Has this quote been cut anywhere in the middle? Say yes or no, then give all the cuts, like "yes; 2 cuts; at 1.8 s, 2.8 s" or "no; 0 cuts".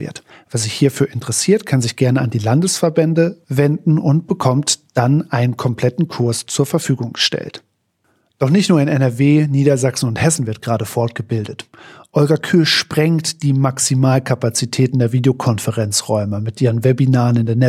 no; 0 cuts